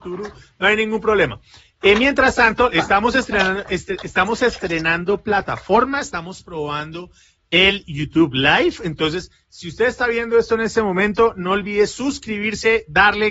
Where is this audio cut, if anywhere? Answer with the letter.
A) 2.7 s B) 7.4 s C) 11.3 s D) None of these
A